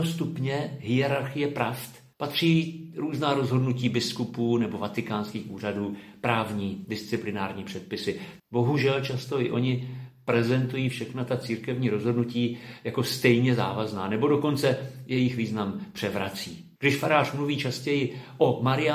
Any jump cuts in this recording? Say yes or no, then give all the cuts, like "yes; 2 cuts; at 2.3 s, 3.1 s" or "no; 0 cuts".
yes; 3 cuts; at 2.1 s, 8.4 s, 16.8 s